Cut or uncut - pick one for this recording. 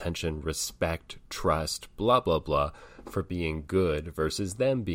uncut